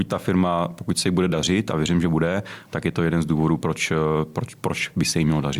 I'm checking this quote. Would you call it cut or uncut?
uncut